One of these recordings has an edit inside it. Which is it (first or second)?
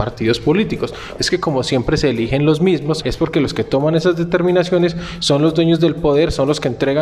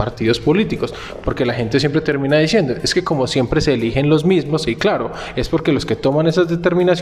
first